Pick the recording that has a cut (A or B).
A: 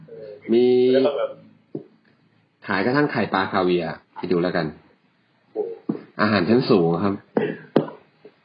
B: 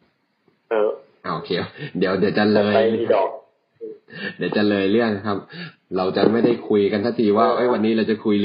A